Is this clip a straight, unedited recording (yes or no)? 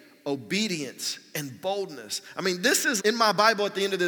no